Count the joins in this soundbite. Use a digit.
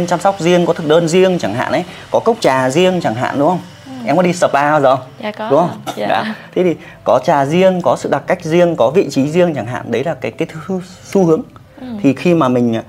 0